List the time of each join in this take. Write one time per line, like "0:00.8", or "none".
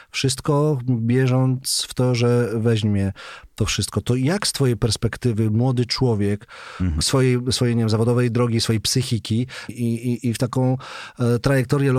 0:07.0
0:09.7